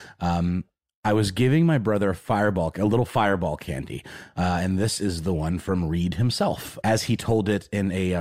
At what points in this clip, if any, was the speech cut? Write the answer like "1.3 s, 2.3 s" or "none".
4.3 s